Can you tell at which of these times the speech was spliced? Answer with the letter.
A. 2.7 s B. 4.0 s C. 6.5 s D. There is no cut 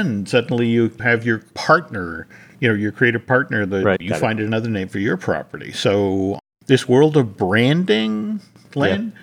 B